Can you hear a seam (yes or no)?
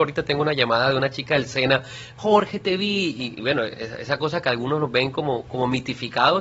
no